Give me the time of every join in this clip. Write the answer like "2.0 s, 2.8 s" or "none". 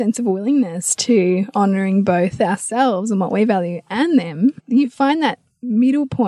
4.6 s